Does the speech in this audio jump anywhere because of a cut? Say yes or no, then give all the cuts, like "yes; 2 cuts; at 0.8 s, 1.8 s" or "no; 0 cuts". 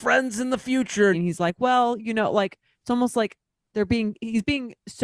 yes; 1 cut; at 1.1 s